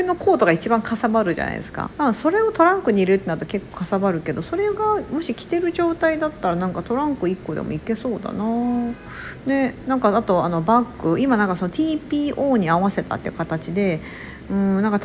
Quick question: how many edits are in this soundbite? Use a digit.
1